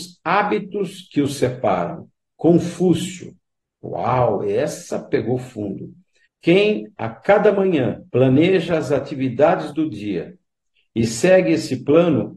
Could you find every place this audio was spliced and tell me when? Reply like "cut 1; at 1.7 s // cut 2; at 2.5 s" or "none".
cut 1; at 6.2 s // cut 2; at 8.1 s